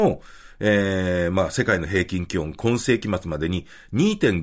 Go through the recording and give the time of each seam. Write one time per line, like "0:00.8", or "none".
none